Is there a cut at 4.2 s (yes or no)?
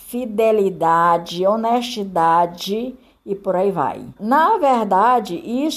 yes